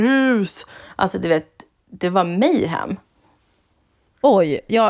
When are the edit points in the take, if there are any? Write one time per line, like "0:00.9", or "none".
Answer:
none